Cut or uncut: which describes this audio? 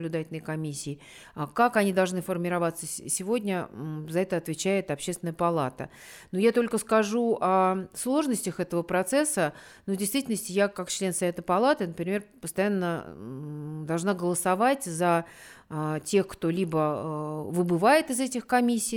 uncut